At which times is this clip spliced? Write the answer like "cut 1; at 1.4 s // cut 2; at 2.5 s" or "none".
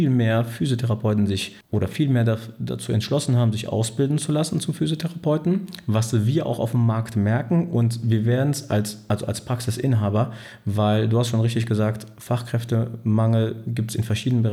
none